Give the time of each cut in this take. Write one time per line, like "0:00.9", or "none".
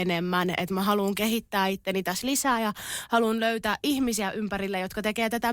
none